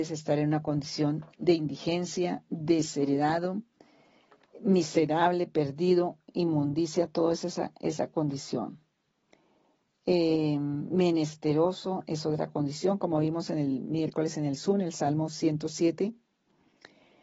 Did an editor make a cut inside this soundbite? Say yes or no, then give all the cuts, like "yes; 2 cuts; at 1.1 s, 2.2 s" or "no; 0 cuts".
no; 0 cuts